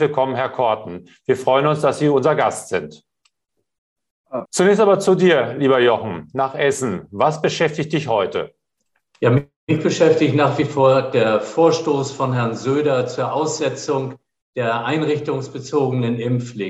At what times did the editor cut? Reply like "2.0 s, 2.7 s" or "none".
4.5 s